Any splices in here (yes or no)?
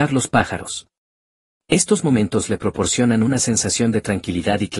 no